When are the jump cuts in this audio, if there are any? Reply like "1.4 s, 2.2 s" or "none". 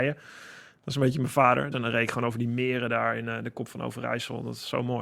1.7 s